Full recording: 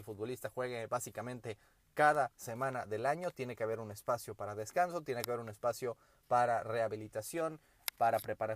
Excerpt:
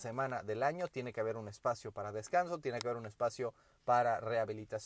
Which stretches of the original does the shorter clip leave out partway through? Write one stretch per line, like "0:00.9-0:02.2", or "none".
none